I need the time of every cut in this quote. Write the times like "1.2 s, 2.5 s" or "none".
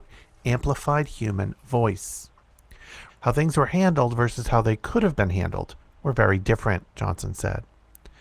3.1 s